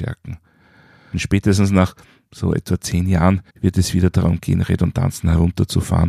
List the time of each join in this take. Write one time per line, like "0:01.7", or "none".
0:01.1
0:03.5